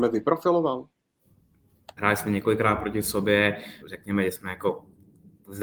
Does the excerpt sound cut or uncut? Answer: cut